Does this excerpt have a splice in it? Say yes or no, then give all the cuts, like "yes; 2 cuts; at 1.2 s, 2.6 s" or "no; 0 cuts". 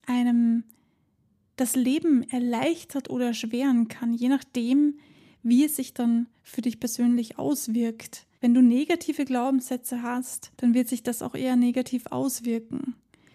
yes; 2 cuts; at 8.3 s, 10.5 s